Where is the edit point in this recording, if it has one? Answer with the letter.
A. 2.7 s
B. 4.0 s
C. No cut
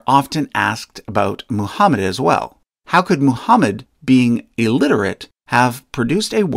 C